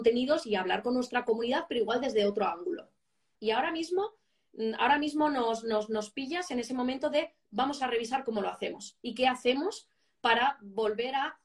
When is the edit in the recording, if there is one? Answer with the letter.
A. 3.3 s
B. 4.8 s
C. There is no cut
A